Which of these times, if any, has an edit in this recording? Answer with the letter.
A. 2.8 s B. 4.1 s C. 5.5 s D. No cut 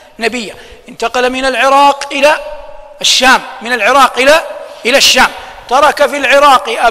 D